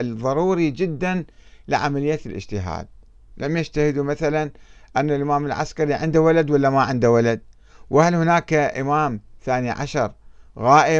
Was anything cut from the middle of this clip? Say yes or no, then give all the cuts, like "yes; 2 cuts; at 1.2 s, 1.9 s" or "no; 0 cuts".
no; 0 cuts